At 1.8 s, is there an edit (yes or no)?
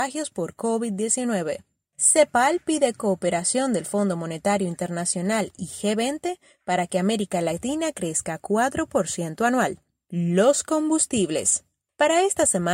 yes